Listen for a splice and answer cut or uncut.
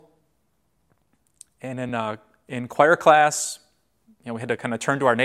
uncut